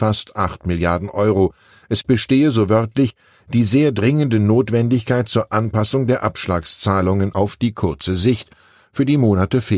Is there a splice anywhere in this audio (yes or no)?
no